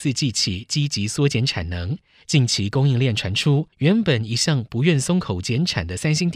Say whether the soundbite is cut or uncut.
cut